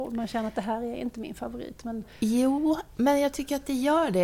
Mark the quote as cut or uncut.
uncut